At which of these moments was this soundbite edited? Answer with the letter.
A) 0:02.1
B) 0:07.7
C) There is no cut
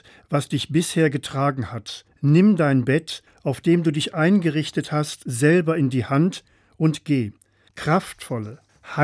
B